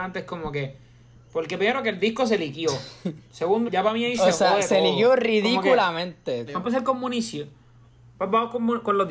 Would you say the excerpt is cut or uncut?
cut